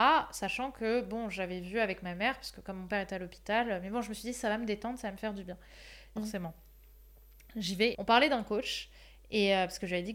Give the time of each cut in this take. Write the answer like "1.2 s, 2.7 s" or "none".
6.2 s, 7.9 s